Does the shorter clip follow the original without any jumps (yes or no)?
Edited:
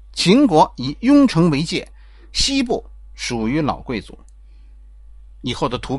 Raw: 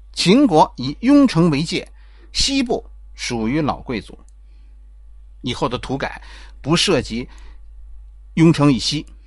yes